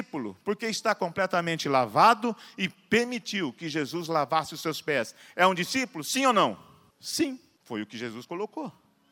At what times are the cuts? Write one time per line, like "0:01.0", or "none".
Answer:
none